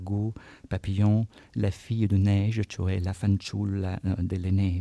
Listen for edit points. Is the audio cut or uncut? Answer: uncut